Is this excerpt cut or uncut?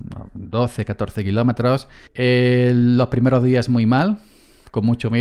cut